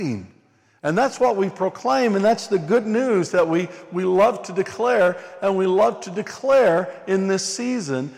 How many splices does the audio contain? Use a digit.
0